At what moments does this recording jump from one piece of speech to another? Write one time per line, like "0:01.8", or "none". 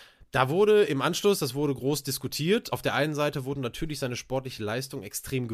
none